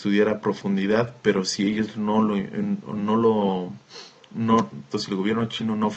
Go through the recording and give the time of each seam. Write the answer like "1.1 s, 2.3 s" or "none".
4.9 s